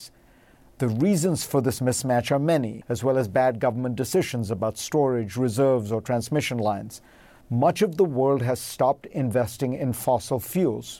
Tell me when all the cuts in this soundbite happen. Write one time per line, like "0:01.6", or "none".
0:02.8
0:07.4